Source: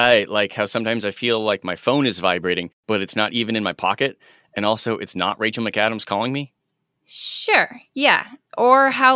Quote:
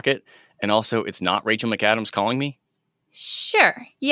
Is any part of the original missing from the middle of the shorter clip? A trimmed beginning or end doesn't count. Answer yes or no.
no